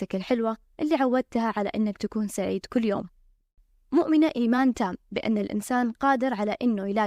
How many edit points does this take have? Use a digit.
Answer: 0